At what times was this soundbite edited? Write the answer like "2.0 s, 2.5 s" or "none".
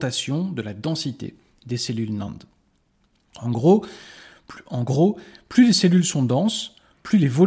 none